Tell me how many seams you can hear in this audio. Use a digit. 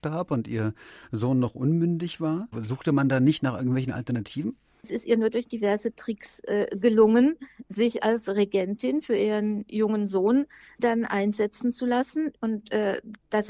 2